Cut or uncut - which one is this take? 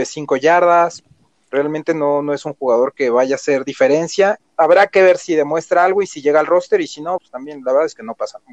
cut